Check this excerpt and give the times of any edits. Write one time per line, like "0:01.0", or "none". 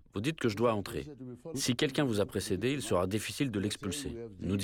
0:01.5

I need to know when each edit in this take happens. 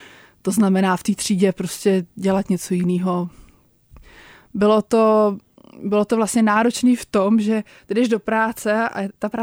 none

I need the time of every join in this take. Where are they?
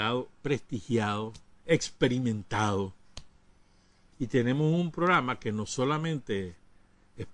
0:04.1

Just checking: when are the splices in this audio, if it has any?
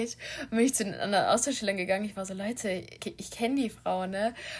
0:03.0

